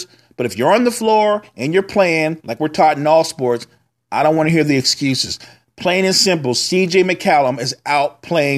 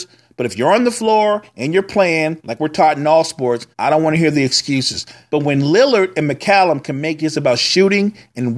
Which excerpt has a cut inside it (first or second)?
second